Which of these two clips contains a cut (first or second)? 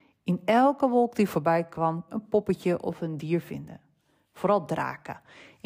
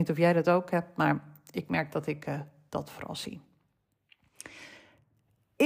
first